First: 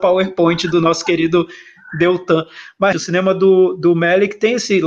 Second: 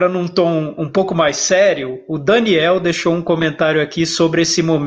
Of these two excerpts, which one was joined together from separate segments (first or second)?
first